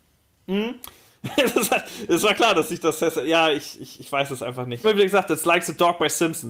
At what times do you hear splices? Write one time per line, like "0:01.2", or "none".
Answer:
0:04.8